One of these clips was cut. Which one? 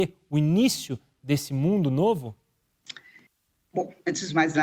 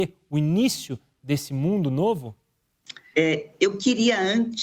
second; 1 cut; at 3.1 s

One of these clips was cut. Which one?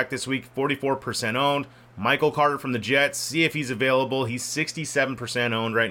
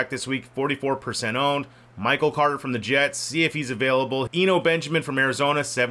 second; 1 cut; at 4.3 s

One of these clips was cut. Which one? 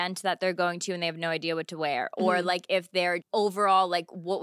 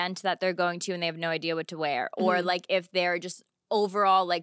first; 1 cut; at 3.2 s

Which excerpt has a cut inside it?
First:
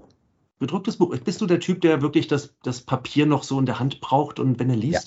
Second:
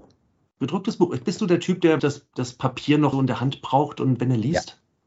second; 2 cuts; at 2.0 s, 3.1 s

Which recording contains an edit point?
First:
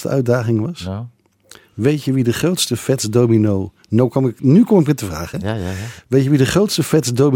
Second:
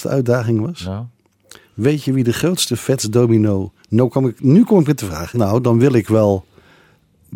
second; 1 cut; at 5.3 s

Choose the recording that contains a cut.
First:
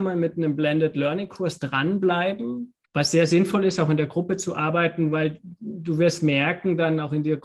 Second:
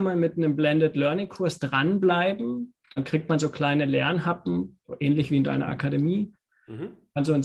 first; 1 cut; at 2.8 s

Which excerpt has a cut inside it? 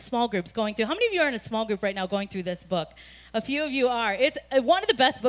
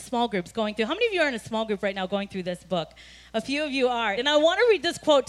second; 1 cut; at 4.1 s

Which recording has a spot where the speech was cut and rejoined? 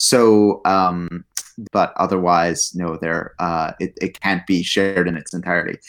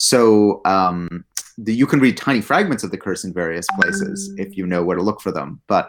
first; 1 cut; at 1.7 s

